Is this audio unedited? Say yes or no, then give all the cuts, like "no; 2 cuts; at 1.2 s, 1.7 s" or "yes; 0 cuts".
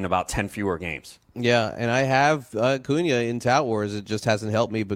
yes; 0 cuts